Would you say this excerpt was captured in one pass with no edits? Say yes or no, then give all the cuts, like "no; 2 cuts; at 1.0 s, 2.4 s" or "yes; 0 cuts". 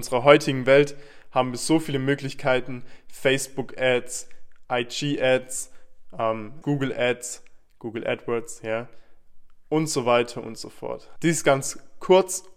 no; 2 cuts; at 6.6 s, 11.2 s